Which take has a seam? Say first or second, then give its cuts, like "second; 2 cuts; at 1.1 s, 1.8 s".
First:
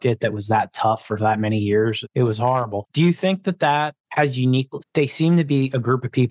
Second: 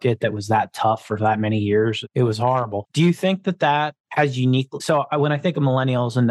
first; 1 cut; at 4.8 s